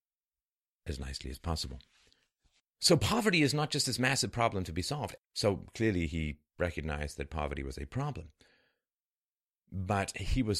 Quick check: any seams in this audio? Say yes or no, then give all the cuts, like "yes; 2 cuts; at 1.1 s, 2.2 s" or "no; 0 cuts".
yes; 2 cuts; at 2.6 s, 5.2 s